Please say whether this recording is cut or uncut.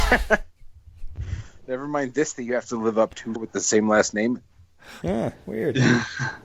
cut